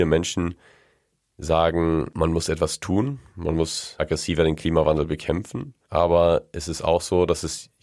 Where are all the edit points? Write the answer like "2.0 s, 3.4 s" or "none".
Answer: 2.1 s, 5.8 s